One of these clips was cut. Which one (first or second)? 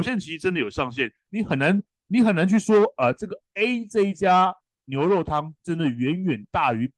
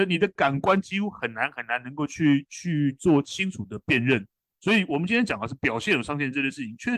second